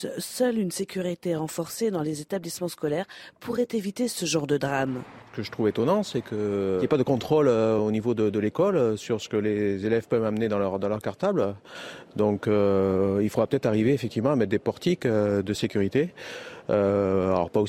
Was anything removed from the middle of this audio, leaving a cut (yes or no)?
no